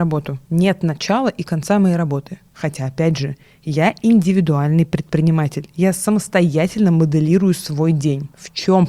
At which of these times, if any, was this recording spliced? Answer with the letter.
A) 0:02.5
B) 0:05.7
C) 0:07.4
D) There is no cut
A